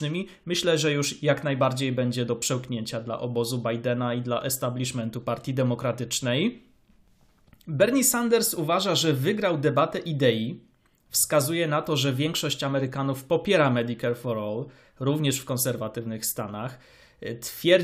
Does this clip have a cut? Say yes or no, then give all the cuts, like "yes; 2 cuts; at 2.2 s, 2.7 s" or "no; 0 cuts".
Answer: no; 0 cuts